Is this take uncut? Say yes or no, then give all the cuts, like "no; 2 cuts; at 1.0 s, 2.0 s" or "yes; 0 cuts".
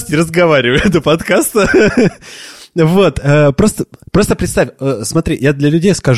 yes; 0 cuts